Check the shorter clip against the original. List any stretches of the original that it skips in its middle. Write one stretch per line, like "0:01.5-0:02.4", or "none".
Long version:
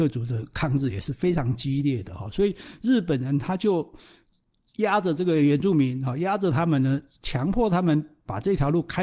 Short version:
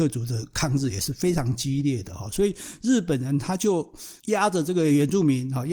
0:04.2-0:04.7